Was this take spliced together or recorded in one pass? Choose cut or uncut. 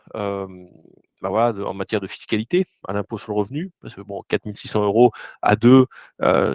uncut